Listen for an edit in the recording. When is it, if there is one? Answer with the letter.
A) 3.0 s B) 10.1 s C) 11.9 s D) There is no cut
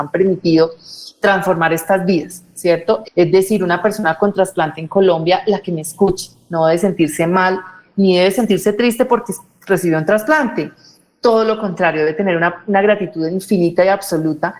A